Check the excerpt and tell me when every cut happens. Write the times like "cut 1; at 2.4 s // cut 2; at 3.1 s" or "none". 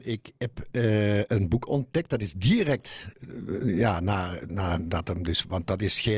none